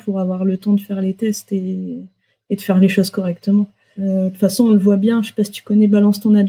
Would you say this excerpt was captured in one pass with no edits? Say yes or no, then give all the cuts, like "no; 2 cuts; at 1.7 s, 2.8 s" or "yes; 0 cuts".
no; 1 cut; at 4.0 s